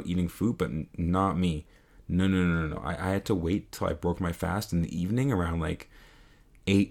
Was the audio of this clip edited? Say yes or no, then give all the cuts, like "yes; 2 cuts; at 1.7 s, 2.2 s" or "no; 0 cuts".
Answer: no; 0 cuts